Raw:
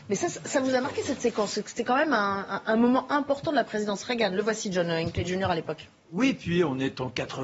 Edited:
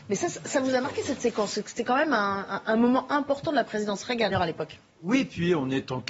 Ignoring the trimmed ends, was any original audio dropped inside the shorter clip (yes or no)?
yes